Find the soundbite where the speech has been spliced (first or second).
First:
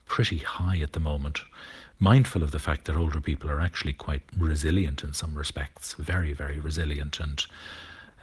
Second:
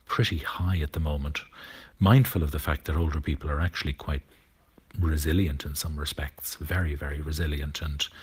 first